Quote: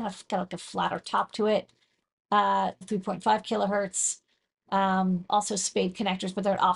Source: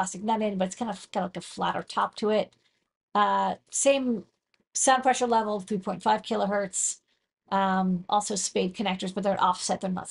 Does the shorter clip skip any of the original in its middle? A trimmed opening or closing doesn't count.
yes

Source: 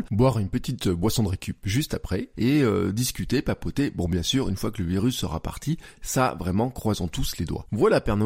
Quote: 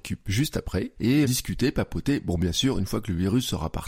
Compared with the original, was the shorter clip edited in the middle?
yes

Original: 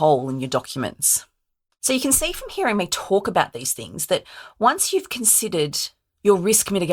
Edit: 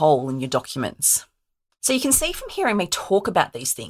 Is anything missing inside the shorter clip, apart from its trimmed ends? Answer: no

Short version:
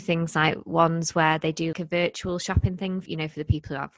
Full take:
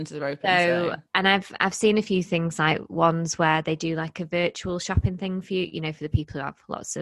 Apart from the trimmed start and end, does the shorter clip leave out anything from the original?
yes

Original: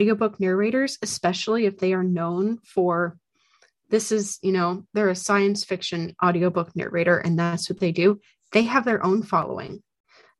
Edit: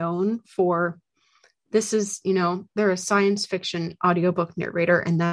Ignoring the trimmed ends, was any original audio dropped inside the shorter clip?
no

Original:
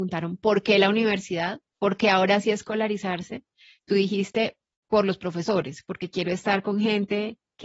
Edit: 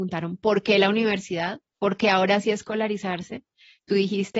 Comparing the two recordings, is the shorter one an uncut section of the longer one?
yes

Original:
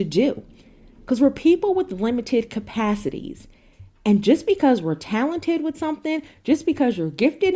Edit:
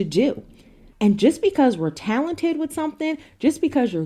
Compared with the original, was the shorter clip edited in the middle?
yes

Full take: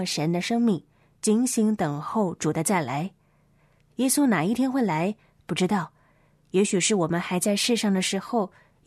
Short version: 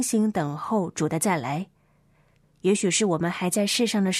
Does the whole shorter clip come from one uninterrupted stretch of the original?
no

